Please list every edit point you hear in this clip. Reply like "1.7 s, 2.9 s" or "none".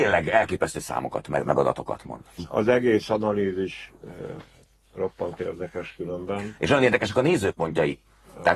2.4 s